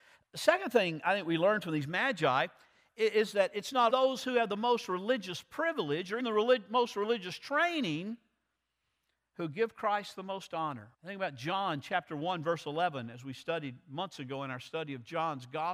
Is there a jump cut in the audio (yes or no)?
yes